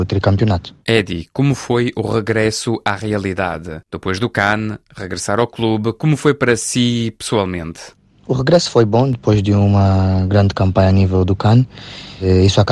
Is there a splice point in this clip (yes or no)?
yes